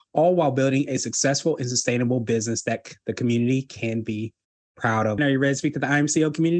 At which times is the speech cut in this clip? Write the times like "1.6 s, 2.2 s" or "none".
5.2 s